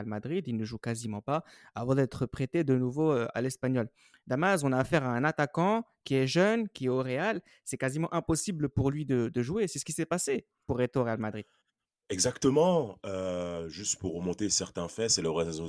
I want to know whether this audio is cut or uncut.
uncut